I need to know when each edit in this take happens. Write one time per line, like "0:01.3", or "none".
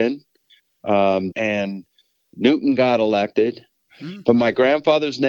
0:01.3
0:03.9